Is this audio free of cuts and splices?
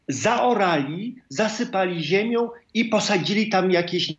yes; 0 cuts

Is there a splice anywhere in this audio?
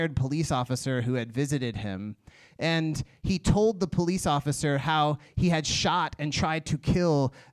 no; 0 cuts

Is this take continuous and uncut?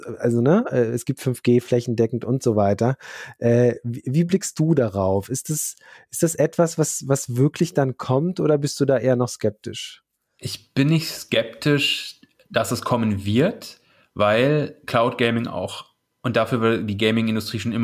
yes; 0 cuts

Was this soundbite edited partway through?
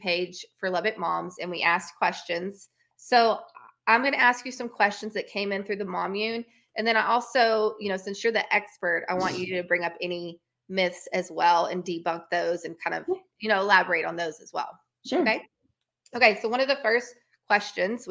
yes; 1 cut; at 2.8 s

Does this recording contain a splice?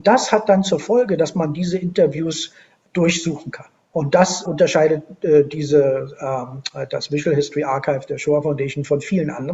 yes; 1 cut; at 4.5 s

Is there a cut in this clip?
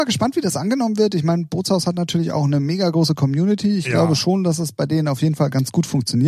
no; 0 cuts

